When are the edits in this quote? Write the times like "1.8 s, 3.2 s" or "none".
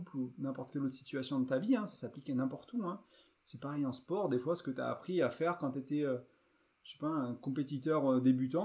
none